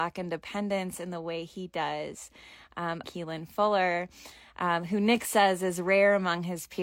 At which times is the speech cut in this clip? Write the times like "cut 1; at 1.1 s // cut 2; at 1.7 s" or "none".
cut 1; at 3.0 s